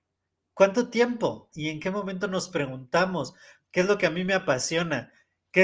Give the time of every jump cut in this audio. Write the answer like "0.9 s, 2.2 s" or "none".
1.5 s, 3.6 s